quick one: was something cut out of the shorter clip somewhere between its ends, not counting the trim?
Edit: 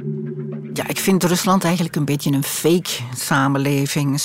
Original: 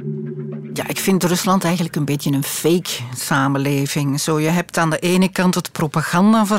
no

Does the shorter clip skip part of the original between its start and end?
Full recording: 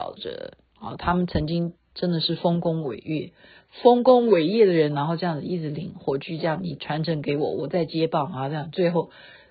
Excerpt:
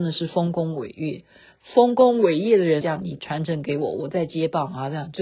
yes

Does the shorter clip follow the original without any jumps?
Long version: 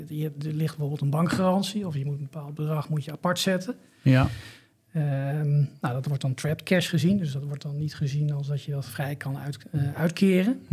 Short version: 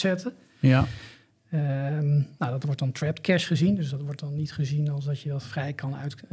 yes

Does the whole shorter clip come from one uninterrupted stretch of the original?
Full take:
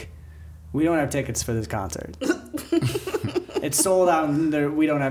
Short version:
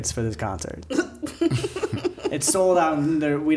yes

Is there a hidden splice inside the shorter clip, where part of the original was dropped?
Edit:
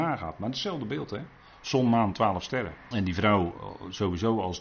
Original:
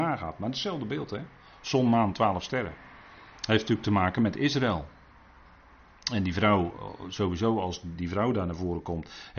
yes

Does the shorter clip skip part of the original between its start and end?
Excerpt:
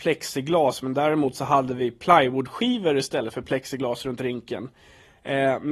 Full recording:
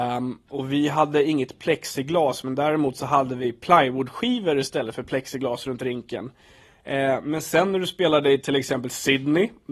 no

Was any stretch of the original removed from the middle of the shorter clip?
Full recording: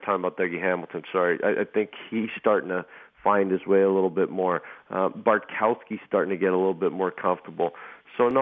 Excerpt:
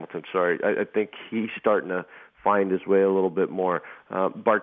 no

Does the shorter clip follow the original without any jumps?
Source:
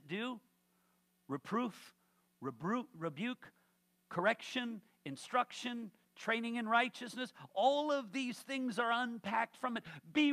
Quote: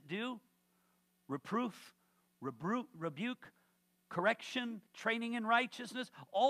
no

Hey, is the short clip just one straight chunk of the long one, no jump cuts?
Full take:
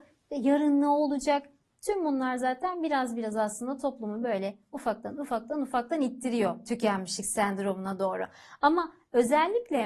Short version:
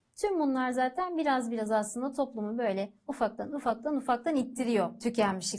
yes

